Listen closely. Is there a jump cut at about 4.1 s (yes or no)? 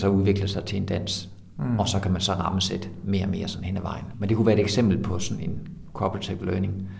no